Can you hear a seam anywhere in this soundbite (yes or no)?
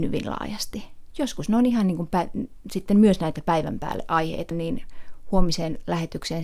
yes